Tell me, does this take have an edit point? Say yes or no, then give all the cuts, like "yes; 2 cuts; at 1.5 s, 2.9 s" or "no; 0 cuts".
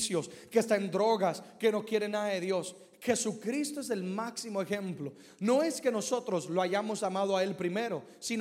no; 0 cuts